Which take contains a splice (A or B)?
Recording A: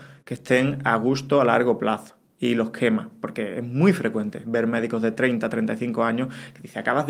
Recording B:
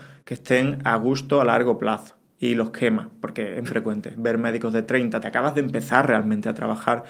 B